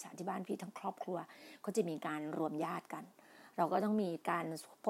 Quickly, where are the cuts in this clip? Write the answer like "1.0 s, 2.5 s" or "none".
none